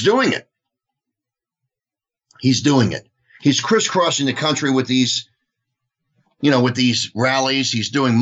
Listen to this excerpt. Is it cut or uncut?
uncut